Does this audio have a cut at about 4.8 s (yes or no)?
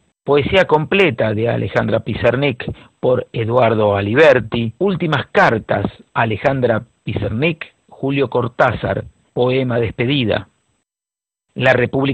yes